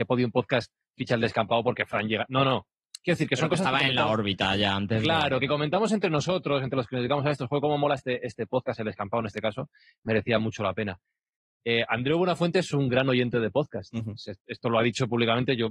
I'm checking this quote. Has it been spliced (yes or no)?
no